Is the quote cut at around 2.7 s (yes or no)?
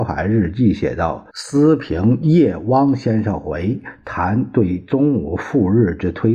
no